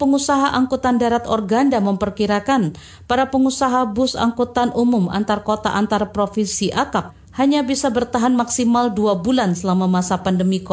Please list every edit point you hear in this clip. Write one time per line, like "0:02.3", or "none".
none